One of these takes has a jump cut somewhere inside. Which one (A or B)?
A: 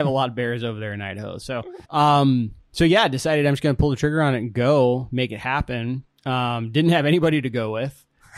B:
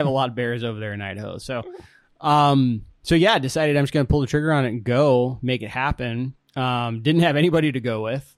A